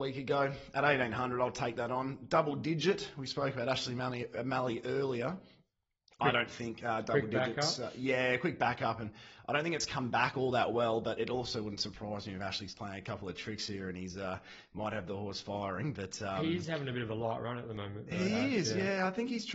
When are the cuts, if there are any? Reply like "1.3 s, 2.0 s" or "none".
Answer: none